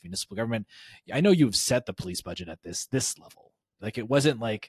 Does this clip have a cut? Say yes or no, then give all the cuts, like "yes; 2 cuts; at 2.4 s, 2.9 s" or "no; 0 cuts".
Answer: yes; 1 cut; at 3.8 s